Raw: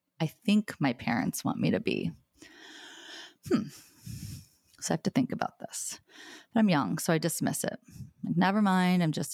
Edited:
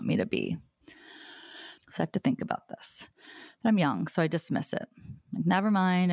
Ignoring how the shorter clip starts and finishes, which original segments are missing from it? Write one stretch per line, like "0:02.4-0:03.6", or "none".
0:03.3-0:04.7